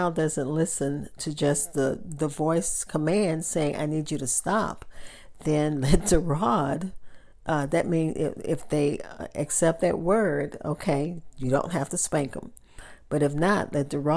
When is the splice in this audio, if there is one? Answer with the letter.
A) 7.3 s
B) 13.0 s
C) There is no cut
C